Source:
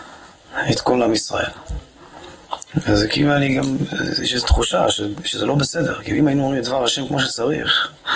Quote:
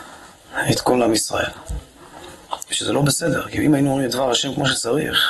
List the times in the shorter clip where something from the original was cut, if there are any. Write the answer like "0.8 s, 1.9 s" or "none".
2.7 s